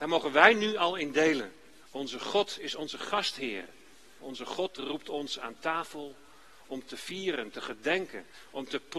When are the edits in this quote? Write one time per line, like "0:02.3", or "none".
0:01.8
0:04.2